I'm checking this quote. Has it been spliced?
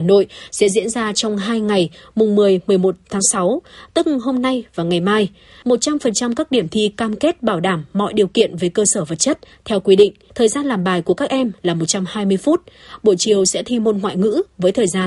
yes; 2 cuts; at 5.6 s, 10.3 s

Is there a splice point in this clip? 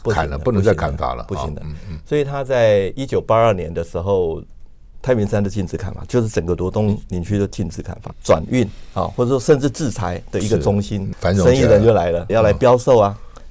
yes; 3 cuts; at 8.1 s, 11.1 s, 12.3 s

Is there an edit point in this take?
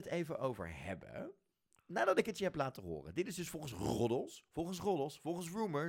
no; 0 cuts

